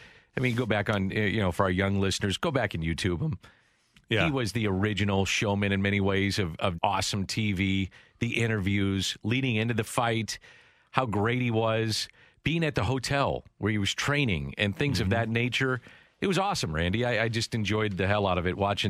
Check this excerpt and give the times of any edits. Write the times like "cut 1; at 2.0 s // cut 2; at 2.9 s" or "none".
cut 1; at 6.8 s